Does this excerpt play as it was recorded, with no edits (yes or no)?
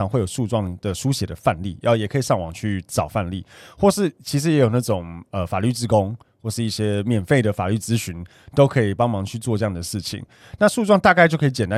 yes